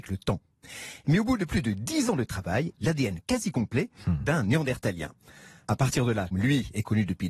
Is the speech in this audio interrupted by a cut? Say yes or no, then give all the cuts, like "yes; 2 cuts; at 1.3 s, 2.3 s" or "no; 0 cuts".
yes; 2 cuts; at 2.7 s, 6.3 s